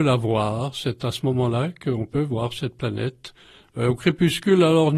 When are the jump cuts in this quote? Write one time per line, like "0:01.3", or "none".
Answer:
none